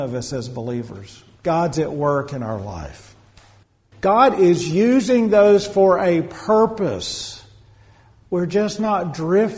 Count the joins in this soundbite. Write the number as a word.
two